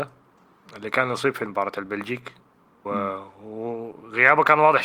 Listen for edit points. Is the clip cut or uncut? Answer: cut